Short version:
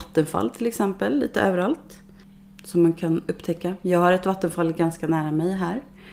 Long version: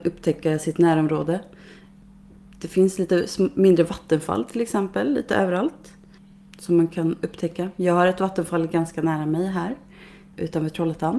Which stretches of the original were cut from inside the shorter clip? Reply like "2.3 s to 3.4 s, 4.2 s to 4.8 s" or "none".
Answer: none